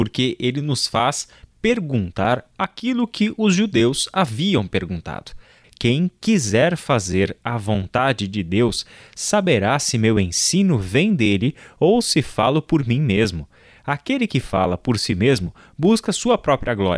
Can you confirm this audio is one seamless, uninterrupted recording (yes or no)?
no